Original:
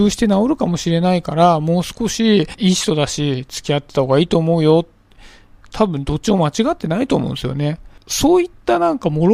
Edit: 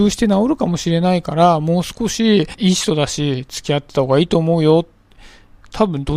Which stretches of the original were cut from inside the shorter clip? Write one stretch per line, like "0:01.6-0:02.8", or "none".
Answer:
none